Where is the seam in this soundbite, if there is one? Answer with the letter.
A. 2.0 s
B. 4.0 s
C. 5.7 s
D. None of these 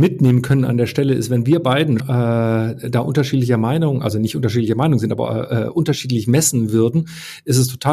A